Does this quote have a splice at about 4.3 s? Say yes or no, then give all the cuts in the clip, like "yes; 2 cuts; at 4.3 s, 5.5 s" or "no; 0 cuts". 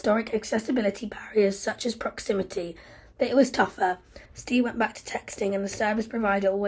yes; 1 cut; at 4.3 s